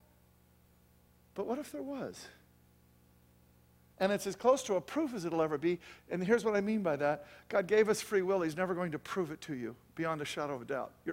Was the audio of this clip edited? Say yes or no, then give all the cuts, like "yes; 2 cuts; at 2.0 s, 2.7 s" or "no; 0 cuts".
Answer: yes; 1 cut; at 3.9 s